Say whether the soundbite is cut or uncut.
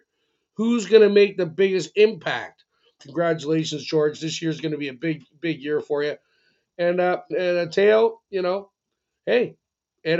cut